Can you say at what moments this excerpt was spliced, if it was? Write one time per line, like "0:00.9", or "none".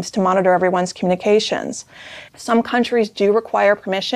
0:02.3